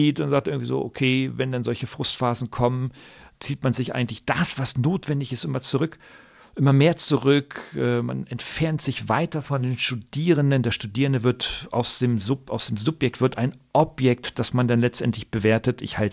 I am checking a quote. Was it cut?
no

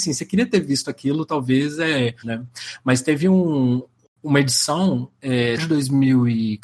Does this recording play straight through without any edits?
no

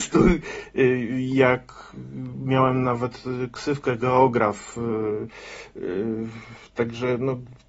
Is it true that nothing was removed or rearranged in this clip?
yes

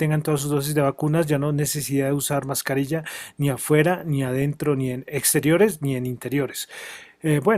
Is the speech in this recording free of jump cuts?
yes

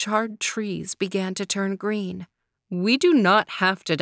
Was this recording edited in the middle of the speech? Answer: yes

